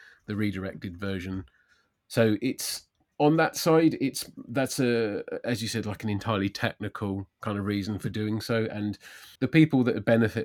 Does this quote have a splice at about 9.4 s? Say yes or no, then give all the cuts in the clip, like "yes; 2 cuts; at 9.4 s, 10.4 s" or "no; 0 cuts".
yes; 1 cut; at 9.4 s